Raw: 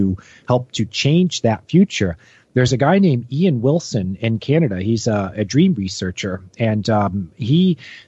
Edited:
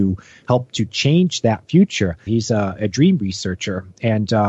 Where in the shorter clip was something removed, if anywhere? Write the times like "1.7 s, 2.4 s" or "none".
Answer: 2.3 s